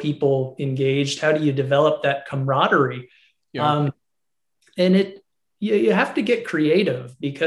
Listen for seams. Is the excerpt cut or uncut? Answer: uncut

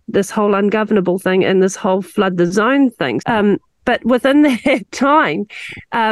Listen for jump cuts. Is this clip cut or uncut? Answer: cut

